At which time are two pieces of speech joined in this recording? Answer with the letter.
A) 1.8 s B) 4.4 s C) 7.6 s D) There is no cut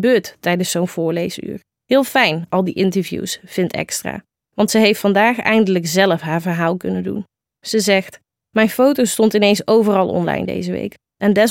A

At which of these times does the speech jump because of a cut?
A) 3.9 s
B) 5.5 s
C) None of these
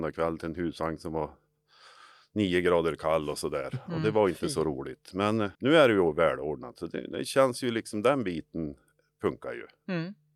B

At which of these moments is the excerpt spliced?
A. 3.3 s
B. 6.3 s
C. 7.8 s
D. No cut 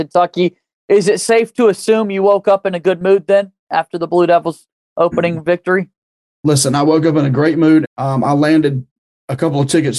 C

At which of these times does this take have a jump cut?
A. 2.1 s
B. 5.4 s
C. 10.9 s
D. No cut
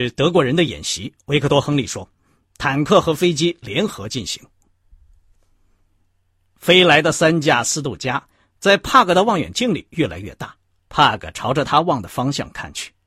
C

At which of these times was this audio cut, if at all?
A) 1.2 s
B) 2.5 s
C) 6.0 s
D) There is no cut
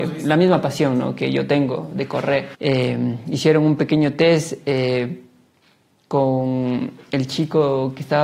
B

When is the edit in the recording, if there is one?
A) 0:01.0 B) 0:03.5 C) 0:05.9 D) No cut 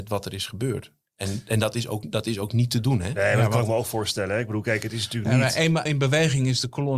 C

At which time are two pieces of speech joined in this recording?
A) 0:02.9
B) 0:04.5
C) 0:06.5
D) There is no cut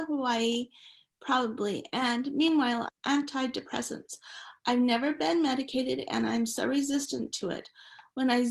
A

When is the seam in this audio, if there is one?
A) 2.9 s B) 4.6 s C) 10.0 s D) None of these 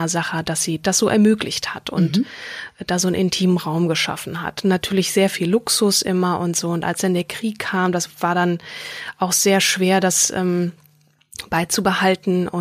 D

